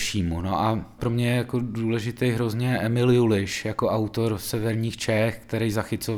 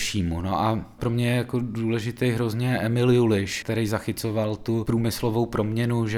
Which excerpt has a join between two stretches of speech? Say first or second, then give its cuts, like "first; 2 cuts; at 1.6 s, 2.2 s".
second; 1 cut; at 3.6 s